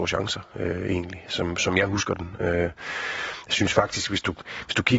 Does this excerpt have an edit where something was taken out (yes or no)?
no